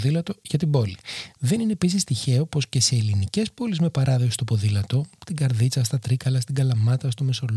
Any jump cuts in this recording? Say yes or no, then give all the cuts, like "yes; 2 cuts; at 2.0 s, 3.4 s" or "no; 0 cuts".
no; 0 cuts